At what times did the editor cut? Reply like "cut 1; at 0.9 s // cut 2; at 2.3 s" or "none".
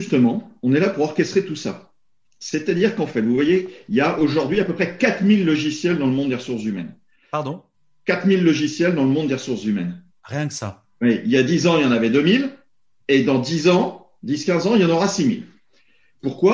none